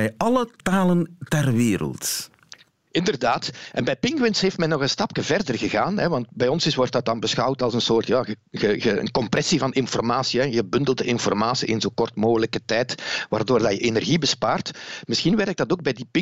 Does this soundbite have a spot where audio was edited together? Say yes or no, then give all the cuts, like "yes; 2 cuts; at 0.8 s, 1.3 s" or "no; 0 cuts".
no; 0 cuts